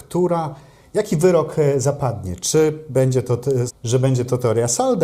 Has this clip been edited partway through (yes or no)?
yes